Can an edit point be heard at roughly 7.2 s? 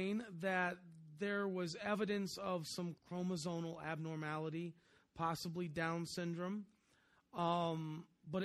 no; 1 cut; at 3.0 s

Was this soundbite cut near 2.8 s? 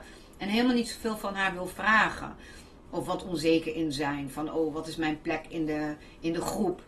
yes; 1 cut; at 2.8 s

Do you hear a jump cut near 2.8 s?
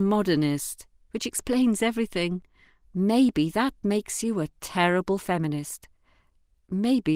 yes; 2 cuts; at 0.9 s, 2.8 s

